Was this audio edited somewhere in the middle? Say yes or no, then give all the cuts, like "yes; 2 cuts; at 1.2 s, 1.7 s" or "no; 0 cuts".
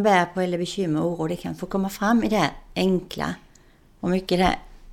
yes; 1 cut; at 4.0 s